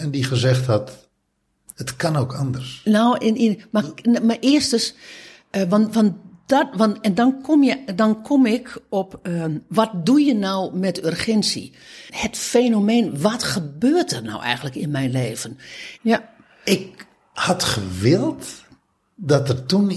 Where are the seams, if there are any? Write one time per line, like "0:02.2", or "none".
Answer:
0:12.1
0:16.0